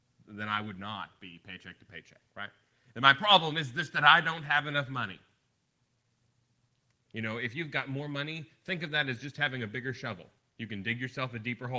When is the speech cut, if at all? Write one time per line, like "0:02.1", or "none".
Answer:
0:07.0